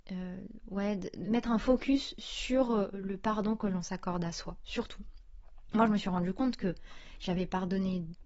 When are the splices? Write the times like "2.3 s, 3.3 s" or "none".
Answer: none